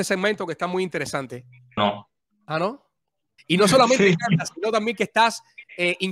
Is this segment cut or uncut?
cut